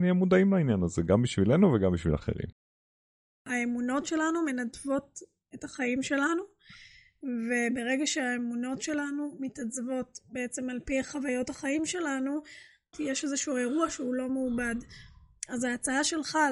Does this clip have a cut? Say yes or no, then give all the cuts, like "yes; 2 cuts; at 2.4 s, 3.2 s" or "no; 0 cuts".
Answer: yes; 1 cut; at 12.9 s